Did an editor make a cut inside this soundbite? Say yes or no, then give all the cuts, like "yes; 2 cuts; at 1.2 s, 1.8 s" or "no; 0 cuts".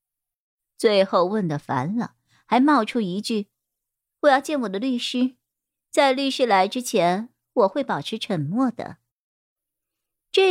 no; 0 cuts